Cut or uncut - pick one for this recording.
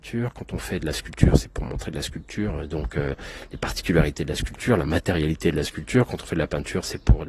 uncut